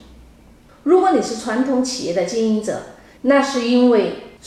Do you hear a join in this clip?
yes; 1 cut; at 3.2 s

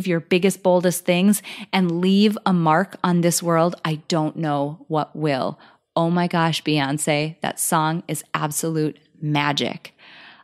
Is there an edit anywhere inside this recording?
no; 0 cuts

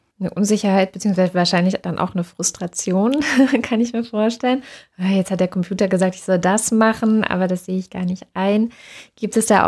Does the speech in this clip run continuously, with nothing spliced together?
yes; 0 cuts

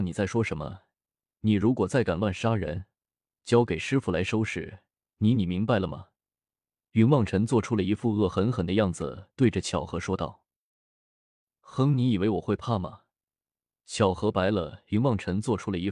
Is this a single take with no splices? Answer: no; 1 cut; at 3.4 s

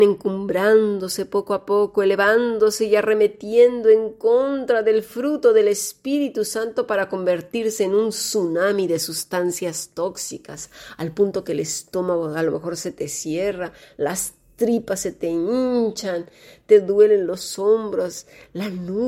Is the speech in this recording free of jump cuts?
yes; 0 cuts

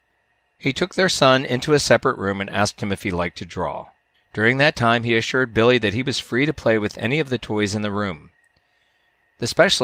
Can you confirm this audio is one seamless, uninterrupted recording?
no; 1 cut; at 4.1 s

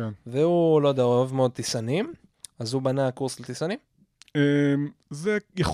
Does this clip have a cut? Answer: no; 0 cuts

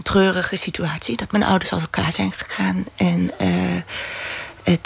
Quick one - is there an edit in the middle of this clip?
no; 0 cuts

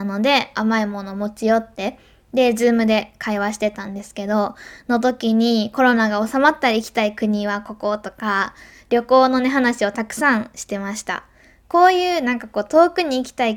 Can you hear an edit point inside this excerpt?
no; 0 cuts

